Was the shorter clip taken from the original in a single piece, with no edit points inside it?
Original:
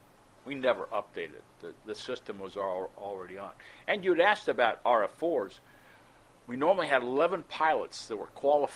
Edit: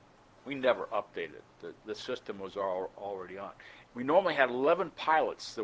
no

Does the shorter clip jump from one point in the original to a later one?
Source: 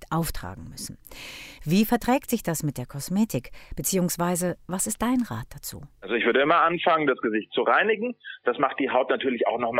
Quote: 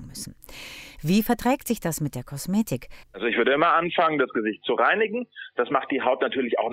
yes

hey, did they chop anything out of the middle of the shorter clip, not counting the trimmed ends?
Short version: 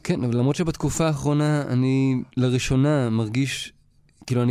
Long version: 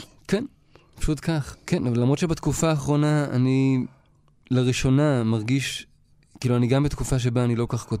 yes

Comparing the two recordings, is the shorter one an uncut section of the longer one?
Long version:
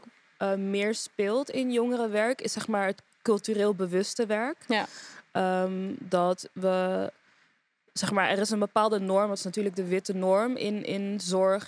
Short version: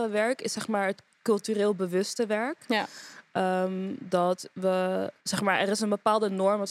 no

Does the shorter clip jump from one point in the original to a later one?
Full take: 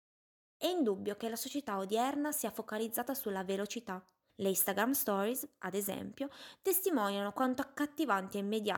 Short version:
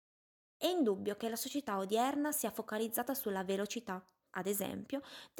yes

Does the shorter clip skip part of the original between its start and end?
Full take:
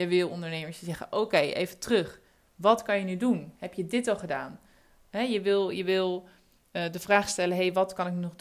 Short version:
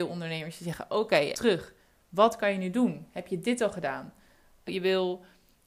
yes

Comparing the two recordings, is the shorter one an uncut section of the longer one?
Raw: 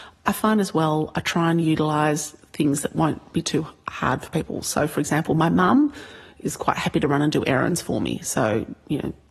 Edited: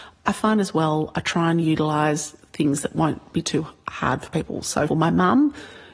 no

